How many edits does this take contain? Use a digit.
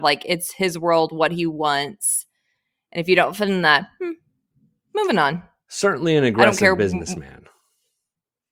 0